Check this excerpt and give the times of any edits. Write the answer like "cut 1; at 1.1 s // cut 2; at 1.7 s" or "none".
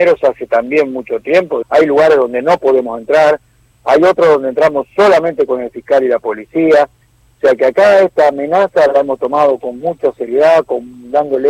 cut 1; at 1.6 s